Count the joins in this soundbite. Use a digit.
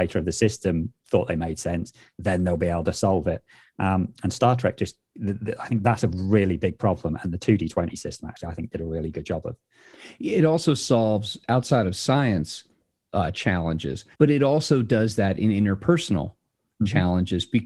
2